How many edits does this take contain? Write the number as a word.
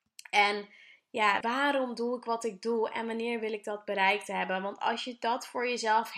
one